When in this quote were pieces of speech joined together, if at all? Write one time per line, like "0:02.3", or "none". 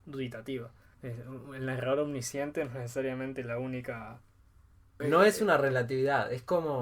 0:00.9
0:05.0